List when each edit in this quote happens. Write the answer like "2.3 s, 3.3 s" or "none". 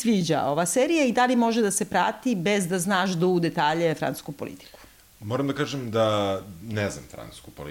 none